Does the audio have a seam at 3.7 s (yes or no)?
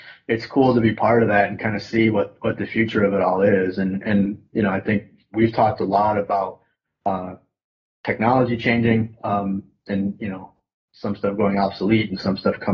no